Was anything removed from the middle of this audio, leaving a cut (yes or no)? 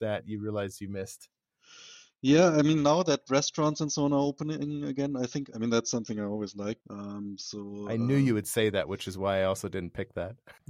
yes